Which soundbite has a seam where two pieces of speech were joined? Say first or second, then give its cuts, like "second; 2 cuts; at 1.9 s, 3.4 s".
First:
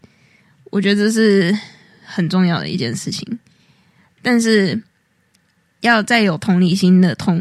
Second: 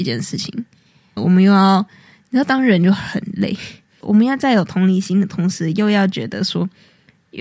second; 1 cut; at 1.2 s